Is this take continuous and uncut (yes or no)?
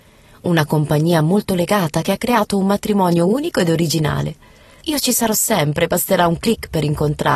no